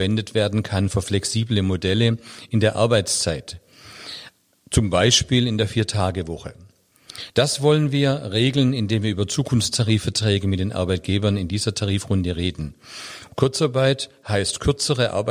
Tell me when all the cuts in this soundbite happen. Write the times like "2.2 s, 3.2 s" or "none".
7.3 s, 13.3 s